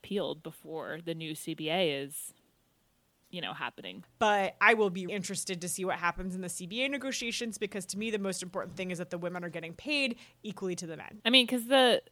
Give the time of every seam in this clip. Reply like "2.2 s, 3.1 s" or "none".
4.0 s, 5.1 s, 11.2 s